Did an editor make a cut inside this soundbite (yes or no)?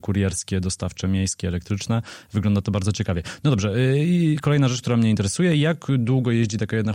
no